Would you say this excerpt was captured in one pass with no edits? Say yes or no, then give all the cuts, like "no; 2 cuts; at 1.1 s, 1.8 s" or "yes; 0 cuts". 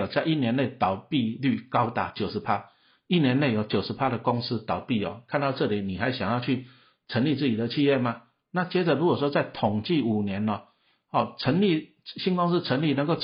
yes; 0 cuts